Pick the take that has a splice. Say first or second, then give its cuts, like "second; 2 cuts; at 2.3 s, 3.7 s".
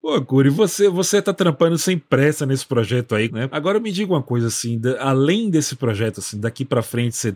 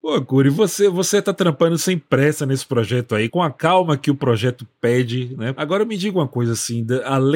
first; 1 cut; at 3.3 s